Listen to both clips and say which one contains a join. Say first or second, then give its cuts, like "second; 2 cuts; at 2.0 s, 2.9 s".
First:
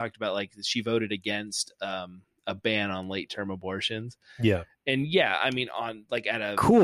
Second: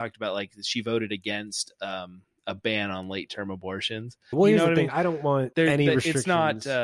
second; 2 cuts; at 4.3 s, 5.5 s